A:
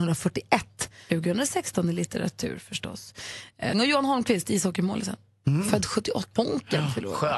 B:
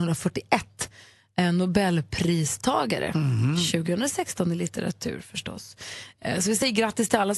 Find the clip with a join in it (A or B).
A